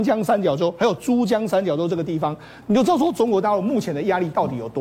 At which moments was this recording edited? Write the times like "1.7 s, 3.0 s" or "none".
2.6 s